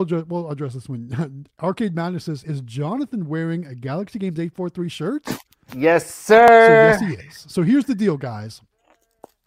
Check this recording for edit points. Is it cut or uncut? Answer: uncut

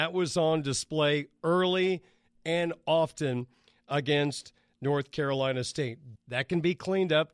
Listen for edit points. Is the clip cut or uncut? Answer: cut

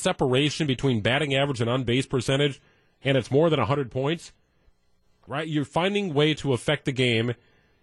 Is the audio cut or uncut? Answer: cut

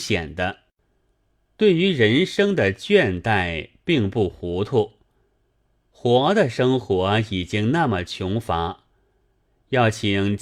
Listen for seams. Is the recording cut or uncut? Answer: uncut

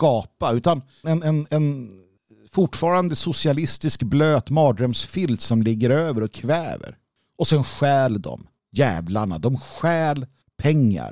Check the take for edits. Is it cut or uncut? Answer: cut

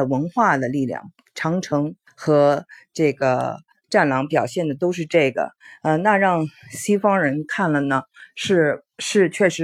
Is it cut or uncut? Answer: uncut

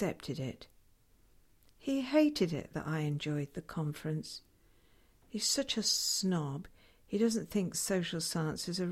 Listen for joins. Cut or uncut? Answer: uncut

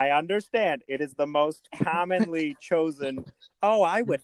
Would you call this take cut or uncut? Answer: uncut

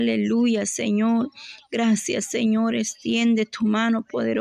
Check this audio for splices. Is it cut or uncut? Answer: uncut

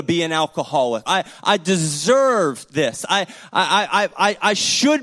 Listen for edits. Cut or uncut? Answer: cut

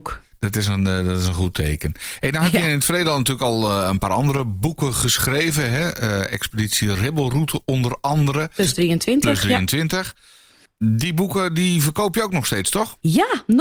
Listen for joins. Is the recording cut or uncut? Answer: uncut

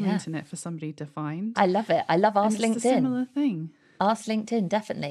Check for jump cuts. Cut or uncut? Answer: uncut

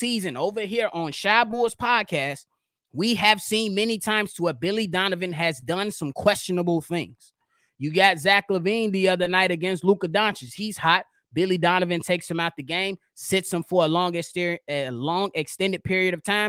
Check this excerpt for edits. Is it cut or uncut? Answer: uncut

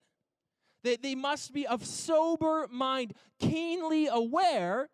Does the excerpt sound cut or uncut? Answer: uncut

